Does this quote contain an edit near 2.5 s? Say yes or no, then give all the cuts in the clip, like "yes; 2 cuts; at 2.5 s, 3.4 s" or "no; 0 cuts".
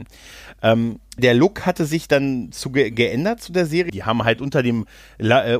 no; 2 cuts; at 1.2 s, 3.9 s